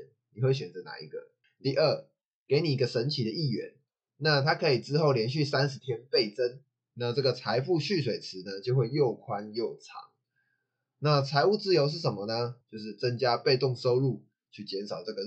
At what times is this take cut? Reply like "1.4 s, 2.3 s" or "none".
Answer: 1.4 s, 6.9 s, 12.6 s